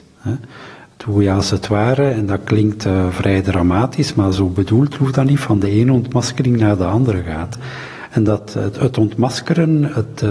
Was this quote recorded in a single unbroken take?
yes; 0 cuts

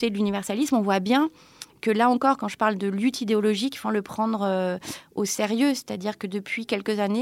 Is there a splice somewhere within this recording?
yes; 1 cut; at 3.8 s

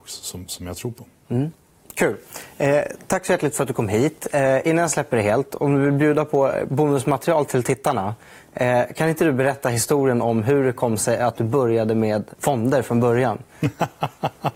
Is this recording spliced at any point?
no; 0 cuts

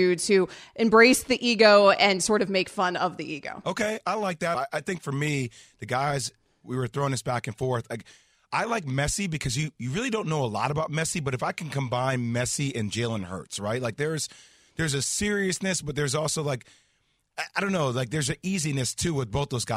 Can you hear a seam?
yes; 1 cut; at 4.5 s

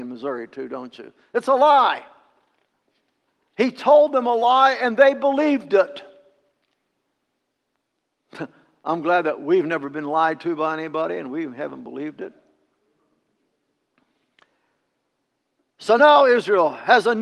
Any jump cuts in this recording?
no; 0 cuts

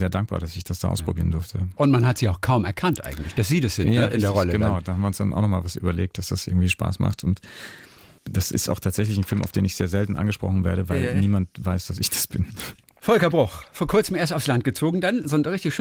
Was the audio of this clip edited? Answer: no; 0 cuts

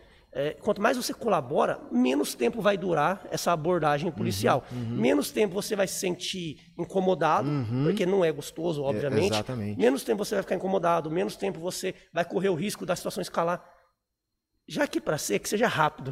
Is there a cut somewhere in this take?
no; 0 cuts

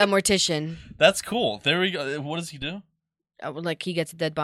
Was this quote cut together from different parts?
no; 0 cuts

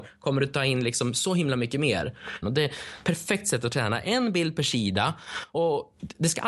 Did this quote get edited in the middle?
yes; 1 cut; at 2.4 s

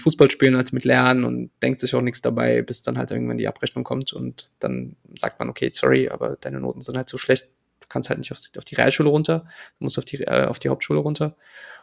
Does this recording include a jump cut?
no; 0 cuts

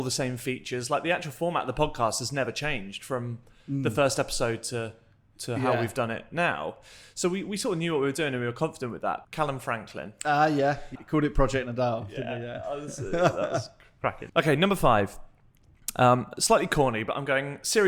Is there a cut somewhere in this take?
yes; 3 cuts; at 9.2 s, 11.0 s, 14.3 s

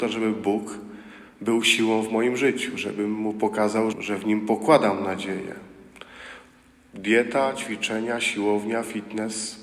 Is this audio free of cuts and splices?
no; 1 cut; at 3.9 s

